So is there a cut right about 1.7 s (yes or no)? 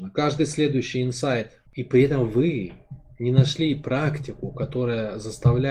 yes